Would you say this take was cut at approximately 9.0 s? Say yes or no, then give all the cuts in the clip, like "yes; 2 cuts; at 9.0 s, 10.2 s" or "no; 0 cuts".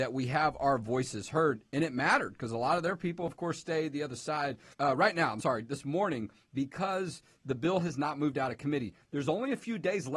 no; 1 cut; at 4.7 s